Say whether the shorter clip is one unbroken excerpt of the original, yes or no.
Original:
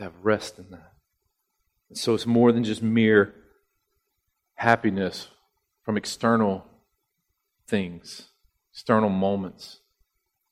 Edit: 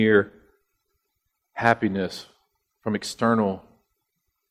yes